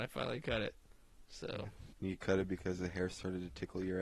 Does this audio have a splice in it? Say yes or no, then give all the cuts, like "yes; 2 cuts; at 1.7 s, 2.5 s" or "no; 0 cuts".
yes; 1 cut; at 1.9 s